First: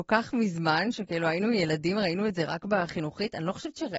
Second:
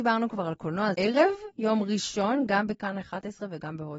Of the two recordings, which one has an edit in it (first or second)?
second